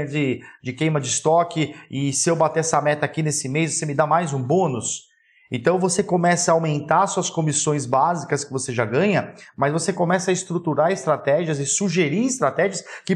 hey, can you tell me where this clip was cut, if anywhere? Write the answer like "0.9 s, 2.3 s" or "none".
none

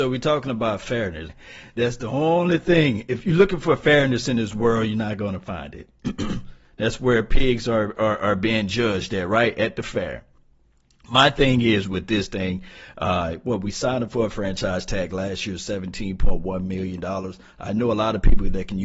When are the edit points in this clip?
1.3 s

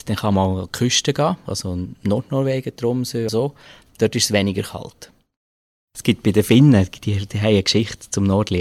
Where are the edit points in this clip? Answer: 3.3 s

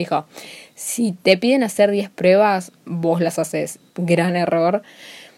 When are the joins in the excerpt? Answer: 3.9 s

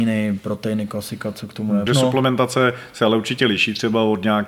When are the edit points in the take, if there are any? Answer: 1.9 s

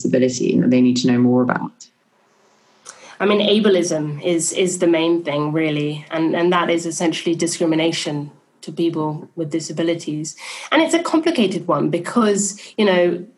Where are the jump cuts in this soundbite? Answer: none

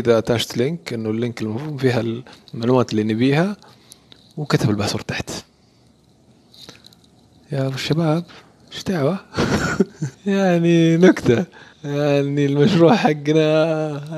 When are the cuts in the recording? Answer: 10.1 s, 11.7 s

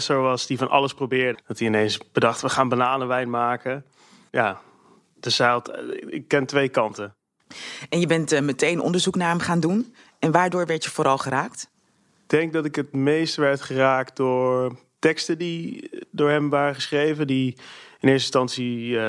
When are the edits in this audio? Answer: 1.3 s

